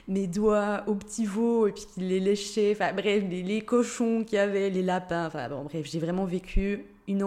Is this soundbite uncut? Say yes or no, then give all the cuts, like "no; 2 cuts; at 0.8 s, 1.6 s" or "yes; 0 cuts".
yes; 0 cuts